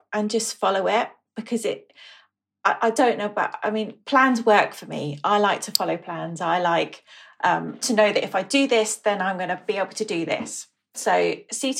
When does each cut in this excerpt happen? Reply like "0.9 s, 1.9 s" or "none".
none